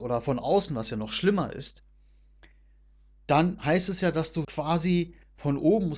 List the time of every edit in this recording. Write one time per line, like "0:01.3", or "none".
0:04.4